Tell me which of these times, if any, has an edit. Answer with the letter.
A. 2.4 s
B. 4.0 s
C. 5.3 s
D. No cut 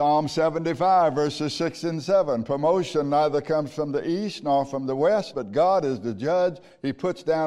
C